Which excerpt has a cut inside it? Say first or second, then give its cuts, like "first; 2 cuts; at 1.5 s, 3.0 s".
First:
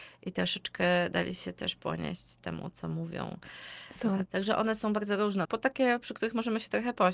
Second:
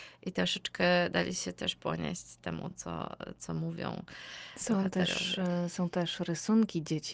first; 3 cuts; at 2.7 s, 4.2 s, 5.4 s